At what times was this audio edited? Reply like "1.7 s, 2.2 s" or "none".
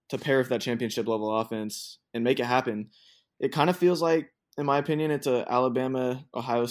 none